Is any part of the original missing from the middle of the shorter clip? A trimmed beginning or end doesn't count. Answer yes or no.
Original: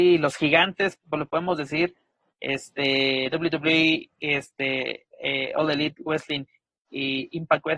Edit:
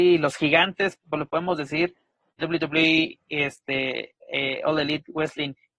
yes